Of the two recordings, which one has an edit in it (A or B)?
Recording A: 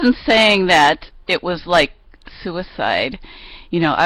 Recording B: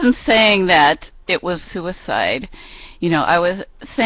B